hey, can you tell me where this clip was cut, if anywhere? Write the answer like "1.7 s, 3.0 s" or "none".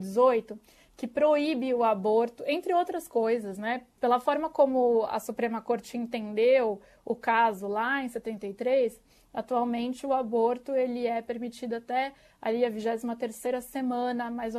4.0 s